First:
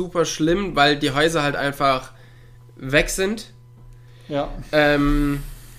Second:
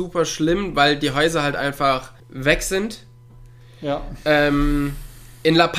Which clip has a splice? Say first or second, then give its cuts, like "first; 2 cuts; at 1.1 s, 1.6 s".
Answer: second; 1 cut; at 2.2 s